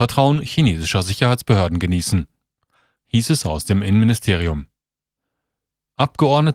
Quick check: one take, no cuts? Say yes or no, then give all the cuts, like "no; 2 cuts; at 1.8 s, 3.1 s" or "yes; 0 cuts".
yes; 0 cuts